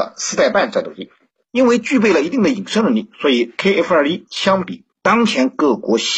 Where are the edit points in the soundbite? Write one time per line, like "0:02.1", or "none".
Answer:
0:04.9